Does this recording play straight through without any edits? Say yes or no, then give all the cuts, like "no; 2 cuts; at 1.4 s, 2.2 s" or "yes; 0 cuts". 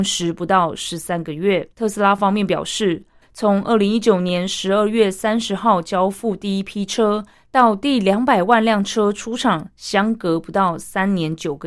no; 2 cuts; at 1.7 s, 3.2 s